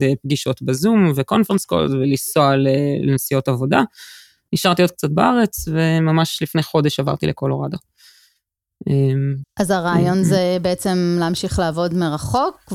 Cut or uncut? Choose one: cut